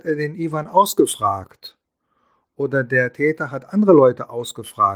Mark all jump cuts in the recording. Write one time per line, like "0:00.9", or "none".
none